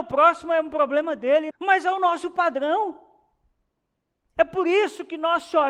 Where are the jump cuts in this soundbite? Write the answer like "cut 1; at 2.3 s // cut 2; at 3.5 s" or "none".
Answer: cut 1; at 1.5 s